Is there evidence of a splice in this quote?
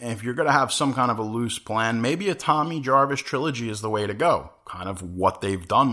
no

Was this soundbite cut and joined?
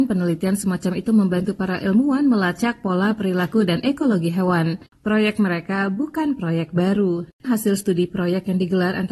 yes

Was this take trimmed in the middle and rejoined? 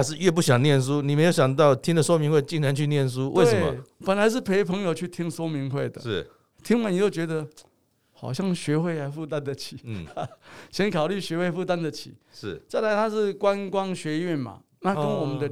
yes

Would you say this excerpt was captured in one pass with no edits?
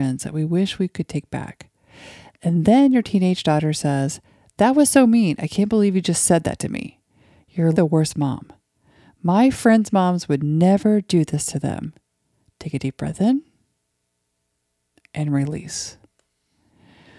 no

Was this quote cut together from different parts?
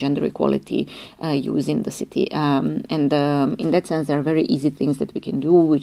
no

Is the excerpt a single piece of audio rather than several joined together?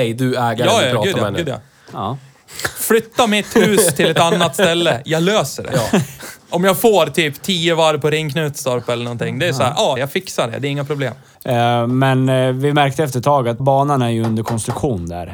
no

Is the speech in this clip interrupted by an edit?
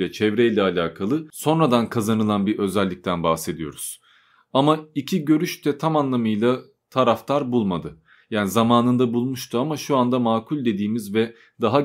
no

